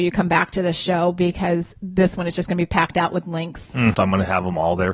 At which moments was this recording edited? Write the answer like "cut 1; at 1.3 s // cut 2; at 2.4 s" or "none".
cut 1; at 3.9 s